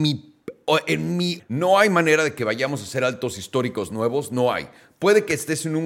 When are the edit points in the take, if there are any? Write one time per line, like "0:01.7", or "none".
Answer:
0:01.4